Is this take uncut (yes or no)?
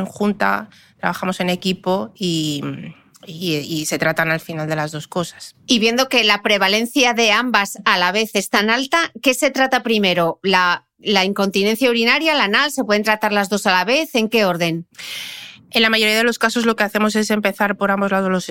yes